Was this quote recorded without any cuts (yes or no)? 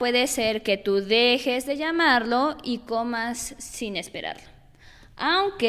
yes